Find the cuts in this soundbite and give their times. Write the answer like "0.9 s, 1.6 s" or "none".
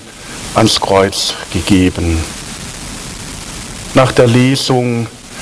3.9 s